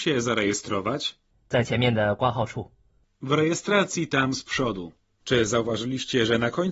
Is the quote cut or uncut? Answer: cut